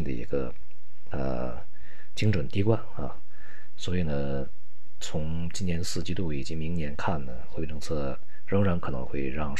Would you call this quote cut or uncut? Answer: uncut